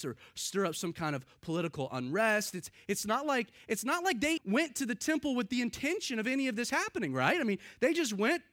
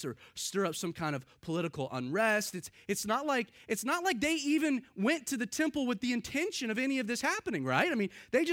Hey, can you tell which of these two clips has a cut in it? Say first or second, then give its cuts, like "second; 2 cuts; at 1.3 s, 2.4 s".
first; 1 cut; at 4.4 s